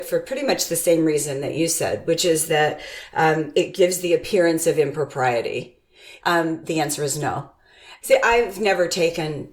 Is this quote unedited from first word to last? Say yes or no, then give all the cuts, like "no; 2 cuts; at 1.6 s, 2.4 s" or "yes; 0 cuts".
no; 2 cuts; at 6.2 s, 8.0 s